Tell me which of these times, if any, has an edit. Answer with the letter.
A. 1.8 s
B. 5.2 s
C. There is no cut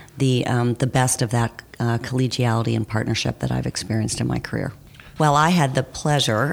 B